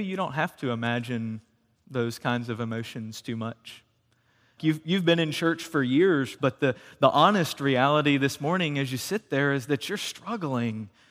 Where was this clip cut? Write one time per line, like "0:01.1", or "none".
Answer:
0:04.6
0:06.4